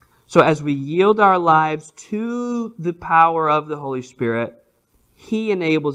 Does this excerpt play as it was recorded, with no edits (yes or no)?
yes